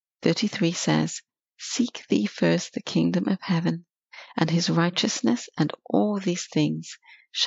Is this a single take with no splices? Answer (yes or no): yes